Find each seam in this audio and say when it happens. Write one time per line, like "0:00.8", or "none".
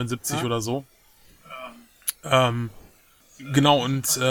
none